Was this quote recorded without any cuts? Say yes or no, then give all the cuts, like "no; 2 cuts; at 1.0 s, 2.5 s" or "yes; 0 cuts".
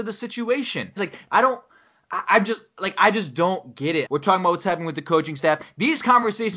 no; 2 cuts; at 1.0 s, 4.1 s